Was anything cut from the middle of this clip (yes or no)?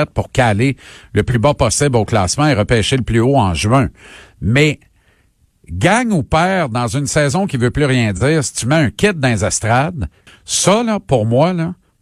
yes